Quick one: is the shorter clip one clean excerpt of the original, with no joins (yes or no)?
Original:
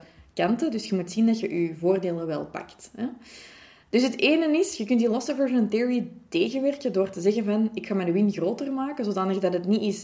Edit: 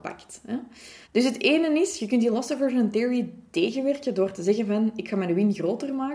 no